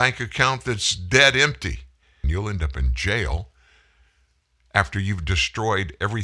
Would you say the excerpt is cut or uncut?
cut